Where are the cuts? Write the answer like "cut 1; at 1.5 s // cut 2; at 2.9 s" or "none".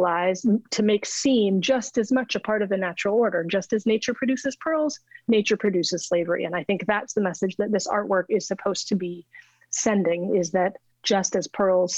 none